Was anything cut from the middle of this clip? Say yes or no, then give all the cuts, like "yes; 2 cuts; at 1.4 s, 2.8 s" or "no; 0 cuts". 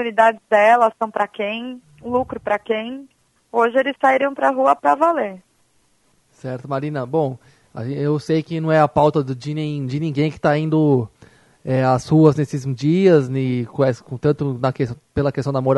yes; 1 cut; at 3.4 s